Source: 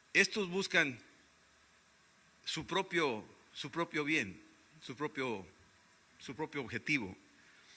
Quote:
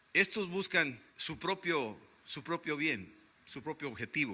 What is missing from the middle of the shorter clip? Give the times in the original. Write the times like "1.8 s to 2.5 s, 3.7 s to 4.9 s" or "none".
1.1 s to 2.4 s, 4.6 s to 6.0 s